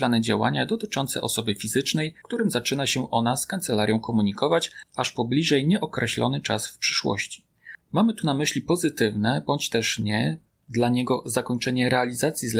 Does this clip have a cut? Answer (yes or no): yes